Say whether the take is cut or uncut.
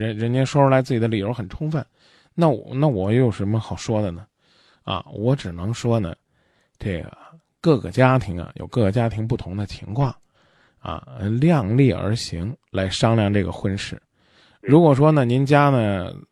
uncut